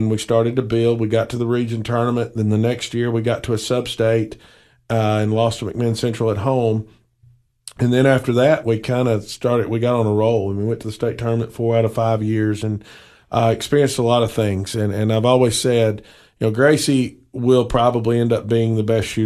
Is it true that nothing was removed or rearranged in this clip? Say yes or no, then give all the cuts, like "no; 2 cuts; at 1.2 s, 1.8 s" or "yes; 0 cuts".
yes; 0 cuts